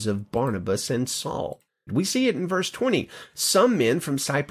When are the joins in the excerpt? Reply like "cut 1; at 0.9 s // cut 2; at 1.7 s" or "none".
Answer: cut 1; at 1.9 s

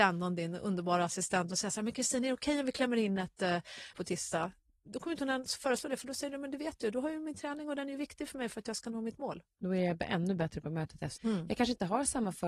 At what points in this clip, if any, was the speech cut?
cut 1; at 3.9 s // cut 2; at 11.2 s

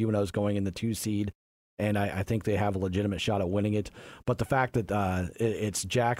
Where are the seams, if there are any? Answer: none

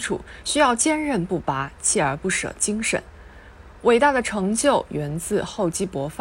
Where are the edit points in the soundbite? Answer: none

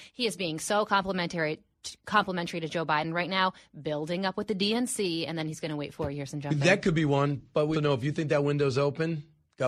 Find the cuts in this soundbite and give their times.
cut 1; at 7.7 s

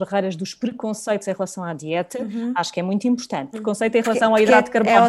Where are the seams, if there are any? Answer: cut 1; at 3.5 s

